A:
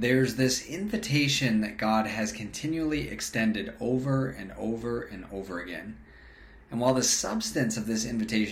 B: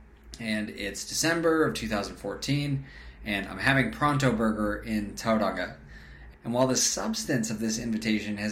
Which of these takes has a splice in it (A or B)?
B